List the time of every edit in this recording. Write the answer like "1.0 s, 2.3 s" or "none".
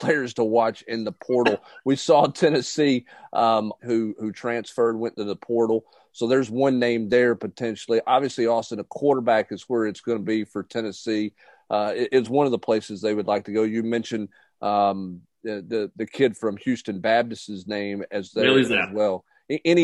3.8 s